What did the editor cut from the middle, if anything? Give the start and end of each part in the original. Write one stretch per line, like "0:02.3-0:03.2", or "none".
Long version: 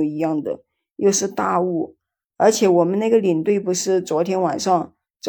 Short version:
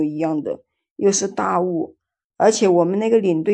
none